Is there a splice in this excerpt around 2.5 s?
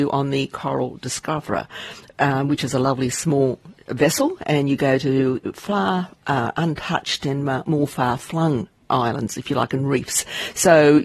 no; 1 cut; at 8.9 s

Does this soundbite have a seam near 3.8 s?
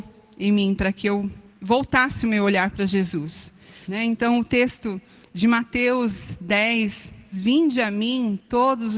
yes; 2 cuts; at 3.8 s, 7.3 s

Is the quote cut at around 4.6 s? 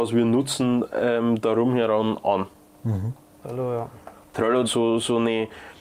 yes; 2 cuts; at 3.4 s, 4.6 s

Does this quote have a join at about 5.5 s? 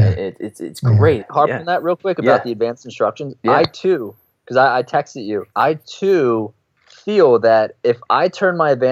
yes; 2 cuts; at 1.2 s, 5.5 s

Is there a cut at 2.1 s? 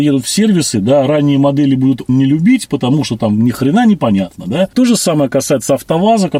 yes; 1 cut; at 2.1 s

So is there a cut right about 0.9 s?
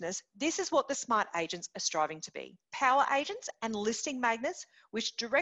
no; 1 cut; at 2.6 s

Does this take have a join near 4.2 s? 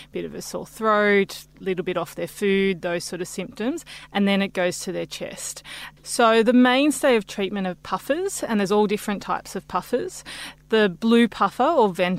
no; 1 cut; at 6.0 s

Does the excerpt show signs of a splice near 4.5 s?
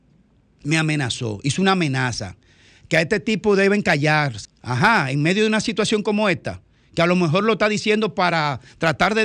yes; 1 cut; at 4.5 s

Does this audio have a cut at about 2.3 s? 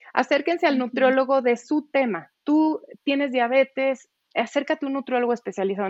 no; 0 cuts

